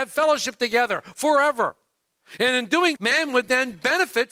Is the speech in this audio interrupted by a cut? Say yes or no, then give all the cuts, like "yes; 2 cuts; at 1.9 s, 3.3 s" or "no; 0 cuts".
yes; 1 cut; at 3.0 s